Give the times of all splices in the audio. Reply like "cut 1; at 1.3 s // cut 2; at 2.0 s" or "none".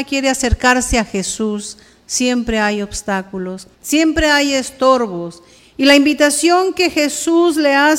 cut 1; at 3.7 s // cut 2; at 5.6 s